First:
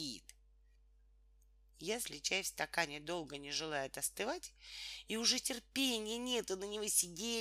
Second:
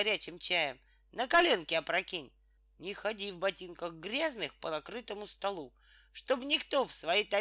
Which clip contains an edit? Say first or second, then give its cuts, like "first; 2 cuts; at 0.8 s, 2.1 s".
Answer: second; 1 cut; at 2.6 s